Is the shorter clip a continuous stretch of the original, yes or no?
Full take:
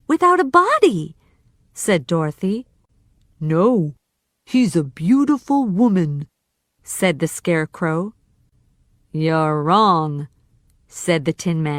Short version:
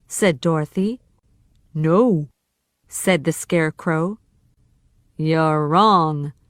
no